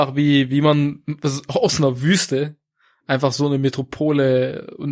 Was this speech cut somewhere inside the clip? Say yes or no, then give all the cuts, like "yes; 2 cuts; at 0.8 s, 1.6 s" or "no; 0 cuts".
no; 0 cuts